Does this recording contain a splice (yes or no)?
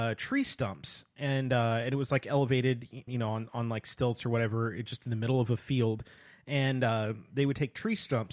yes